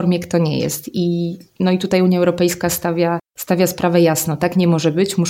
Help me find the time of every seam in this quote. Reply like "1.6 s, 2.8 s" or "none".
none